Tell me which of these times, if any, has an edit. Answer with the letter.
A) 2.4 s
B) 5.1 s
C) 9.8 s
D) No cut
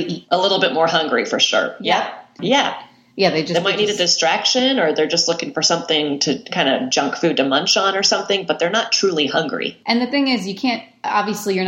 A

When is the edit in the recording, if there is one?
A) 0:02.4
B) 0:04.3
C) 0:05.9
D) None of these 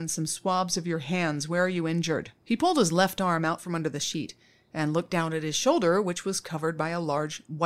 A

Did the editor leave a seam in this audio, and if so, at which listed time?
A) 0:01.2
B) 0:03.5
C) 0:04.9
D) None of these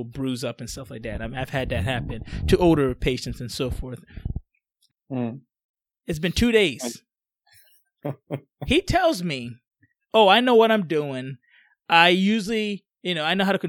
C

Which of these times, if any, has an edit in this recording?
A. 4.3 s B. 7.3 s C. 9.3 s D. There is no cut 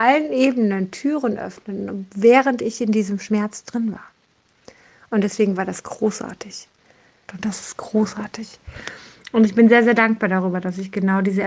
B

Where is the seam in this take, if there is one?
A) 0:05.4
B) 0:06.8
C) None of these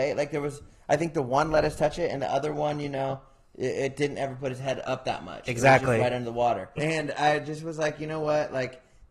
B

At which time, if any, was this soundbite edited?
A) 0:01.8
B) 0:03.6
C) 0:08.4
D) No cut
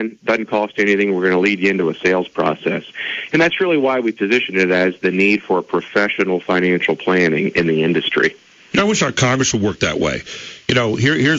D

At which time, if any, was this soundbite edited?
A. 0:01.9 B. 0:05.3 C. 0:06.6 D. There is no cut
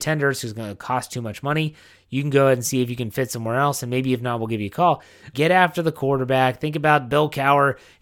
B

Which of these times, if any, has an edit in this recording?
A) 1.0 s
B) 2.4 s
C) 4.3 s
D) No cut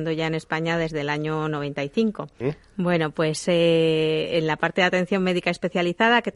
B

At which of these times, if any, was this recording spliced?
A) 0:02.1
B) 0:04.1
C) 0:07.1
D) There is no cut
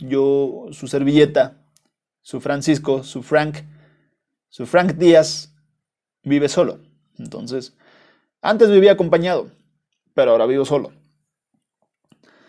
D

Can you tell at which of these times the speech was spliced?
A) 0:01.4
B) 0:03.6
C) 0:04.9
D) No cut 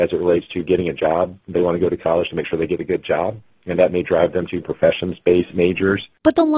D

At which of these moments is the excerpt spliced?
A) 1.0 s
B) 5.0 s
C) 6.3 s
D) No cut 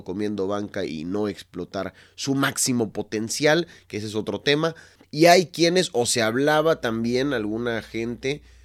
B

